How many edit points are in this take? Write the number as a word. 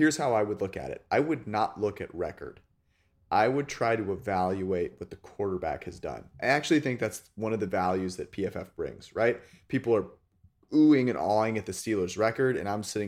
zero